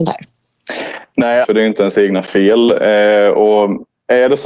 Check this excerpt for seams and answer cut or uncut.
cut